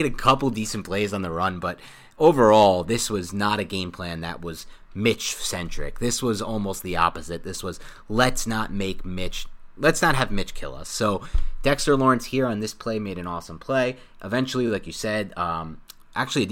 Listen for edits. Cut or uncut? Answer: uncut